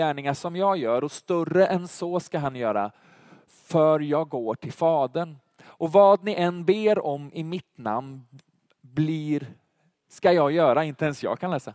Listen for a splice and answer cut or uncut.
uncut